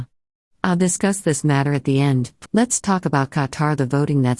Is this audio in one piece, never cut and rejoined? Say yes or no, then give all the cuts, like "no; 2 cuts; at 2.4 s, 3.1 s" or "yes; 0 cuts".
no; 1 cut; at 2.5 s